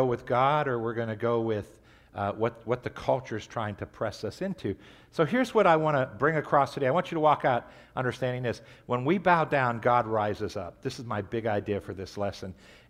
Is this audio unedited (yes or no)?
yes